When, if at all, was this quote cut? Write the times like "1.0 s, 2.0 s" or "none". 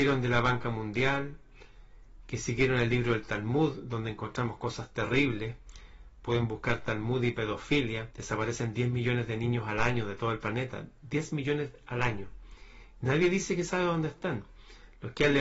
8.1 s